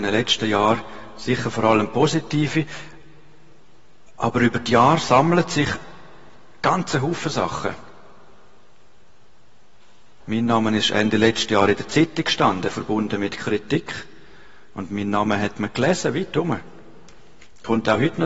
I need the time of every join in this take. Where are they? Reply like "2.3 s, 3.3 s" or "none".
10.2 s